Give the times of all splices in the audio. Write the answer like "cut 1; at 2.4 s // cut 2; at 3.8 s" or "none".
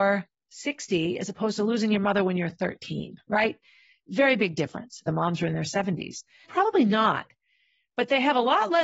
cut 1; at 5.0 s // cut 2; at 6.4 s